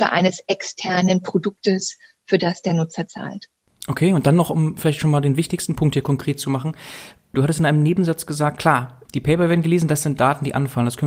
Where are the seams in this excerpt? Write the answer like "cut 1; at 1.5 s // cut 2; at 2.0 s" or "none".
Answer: cut 1; at 7.3 s // cut 2; at 9.1 s

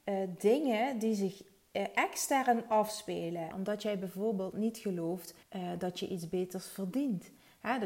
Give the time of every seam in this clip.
cut 1; at 3.5 s // cut 2; at 5.4 s

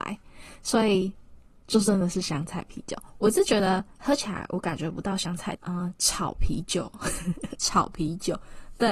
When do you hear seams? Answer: cut 1; at 5.6 s // cut 2; at 7.6 s

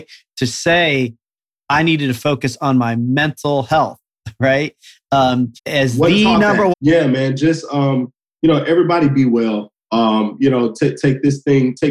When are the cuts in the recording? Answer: cut 1; at 5.6 s // cut 2; at 6.7 s

